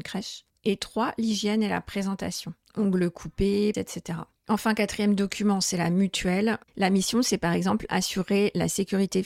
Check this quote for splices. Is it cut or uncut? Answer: cut